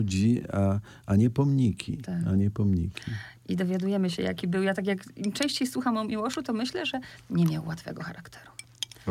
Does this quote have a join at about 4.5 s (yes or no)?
no